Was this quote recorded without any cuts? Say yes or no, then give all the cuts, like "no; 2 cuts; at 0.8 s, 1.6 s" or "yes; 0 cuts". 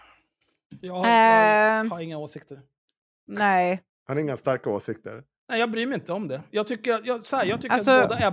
yes; 0 cuts